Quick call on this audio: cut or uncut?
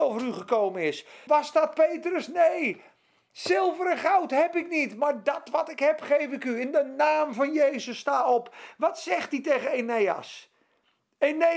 cut